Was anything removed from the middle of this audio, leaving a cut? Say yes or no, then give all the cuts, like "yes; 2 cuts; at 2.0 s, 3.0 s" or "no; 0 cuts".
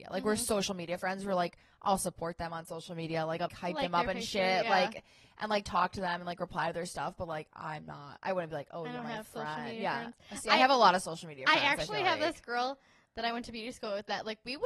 yes; 1 cut; at 3.5 s